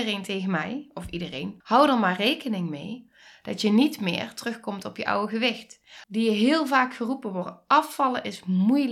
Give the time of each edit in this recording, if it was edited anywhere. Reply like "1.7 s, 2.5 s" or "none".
1.6 s, 6.0 s

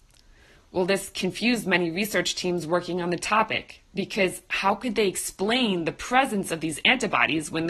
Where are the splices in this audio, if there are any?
none

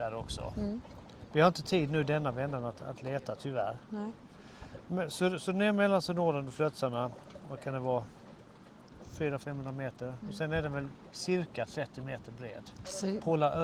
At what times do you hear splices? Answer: none

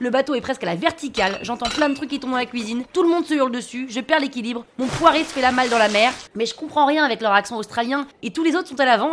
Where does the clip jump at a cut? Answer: 6.3 s, 8.1 s

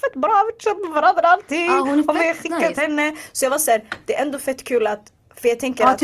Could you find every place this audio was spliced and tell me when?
none

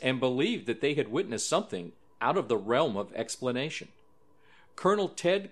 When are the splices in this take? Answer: 2.0 s

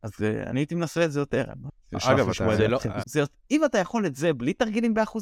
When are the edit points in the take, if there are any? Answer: 3.0 s

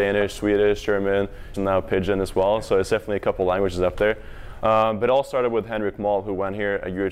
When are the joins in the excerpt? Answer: 1.5 s, 4.6 s

